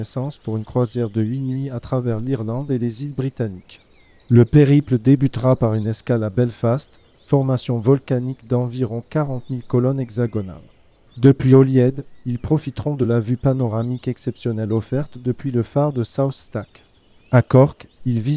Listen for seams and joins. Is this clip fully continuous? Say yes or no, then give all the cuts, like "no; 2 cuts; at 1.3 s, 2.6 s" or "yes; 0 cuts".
no; 2 cuts; at 7.1 s, 11.1 s